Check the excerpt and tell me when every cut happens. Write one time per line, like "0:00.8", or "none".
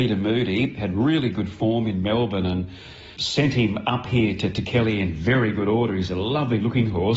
0:03.2